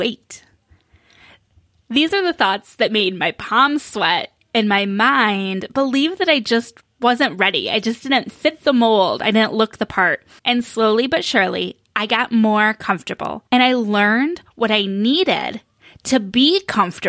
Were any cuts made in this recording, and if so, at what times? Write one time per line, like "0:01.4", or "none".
0:10.4
0:13.5